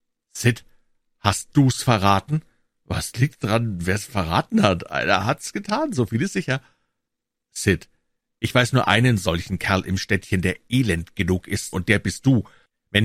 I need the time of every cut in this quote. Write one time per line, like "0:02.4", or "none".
0:11.7